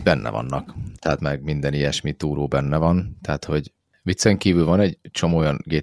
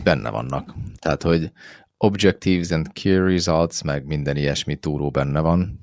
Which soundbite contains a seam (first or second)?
first